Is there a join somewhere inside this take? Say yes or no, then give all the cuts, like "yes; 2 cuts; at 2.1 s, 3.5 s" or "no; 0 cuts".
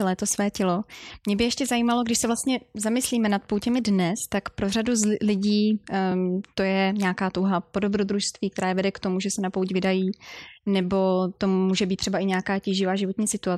no; 0 cuts